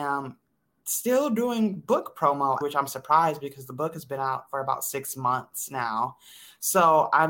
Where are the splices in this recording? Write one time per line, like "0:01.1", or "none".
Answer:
0:02.6